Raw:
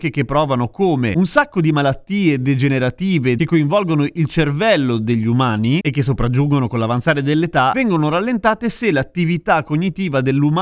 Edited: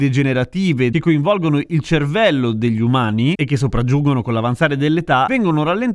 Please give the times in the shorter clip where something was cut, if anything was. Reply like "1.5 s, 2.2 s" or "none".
none

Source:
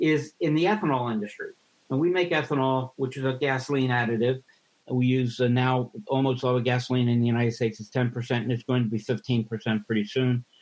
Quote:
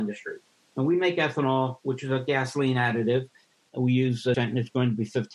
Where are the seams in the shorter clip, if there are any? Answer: 4.3 s

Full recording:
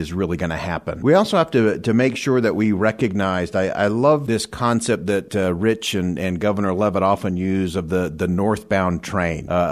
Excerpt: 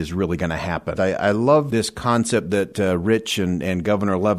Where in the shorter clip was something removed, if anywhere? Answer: 0.9 s

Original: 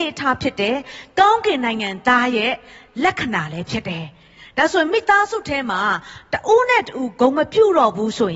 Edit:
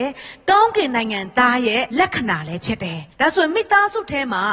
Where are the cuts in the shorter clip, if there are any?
1.9 s, 3.1 s

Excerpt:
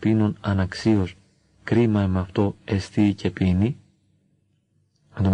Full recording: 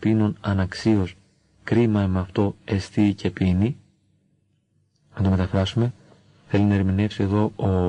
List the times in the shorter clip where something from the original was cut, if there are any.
none

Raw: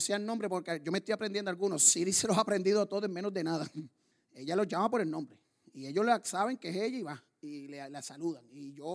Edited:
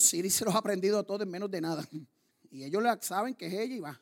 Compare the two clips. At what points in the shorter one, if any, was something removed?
2.3 s

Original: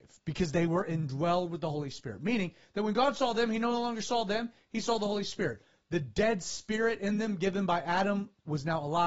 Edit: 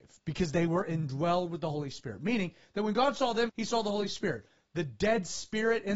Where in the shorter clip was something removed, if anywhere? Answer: 3.5 s

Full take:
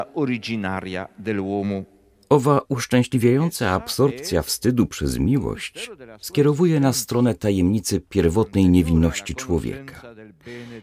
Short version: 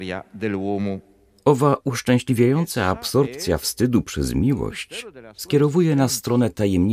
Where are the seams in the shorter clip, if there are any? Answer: none

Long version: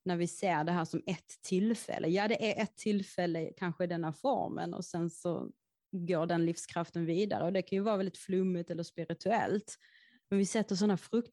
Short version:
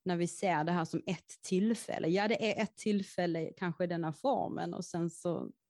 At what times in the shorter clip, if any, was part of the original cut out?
none

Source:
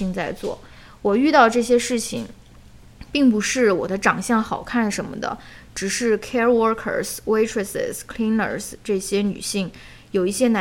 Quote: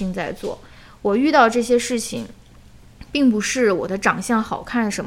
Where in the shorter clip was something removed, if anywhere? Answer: none

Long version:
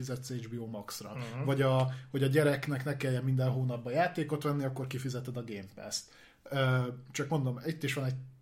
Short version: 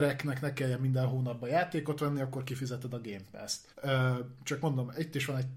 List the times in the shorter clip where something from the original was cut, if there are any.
3.7 s

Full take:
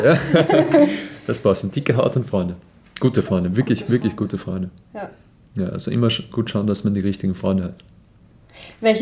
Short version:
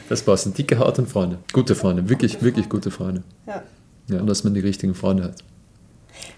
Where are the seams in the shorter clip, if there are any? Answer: 1.4 s, 4.2 s

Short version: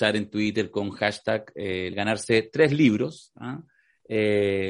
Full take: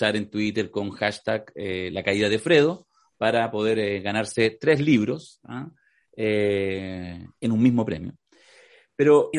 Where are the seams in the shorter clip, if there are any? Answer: 1.9 s

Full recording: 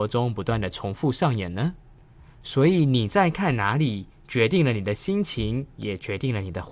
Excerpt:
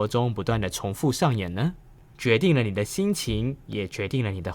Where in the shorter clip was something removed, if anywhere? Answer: 2.1 s

